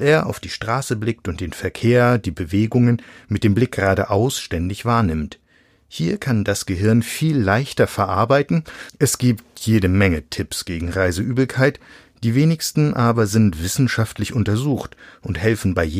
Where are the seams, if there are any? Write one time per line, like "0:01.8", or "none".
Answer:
0:08.9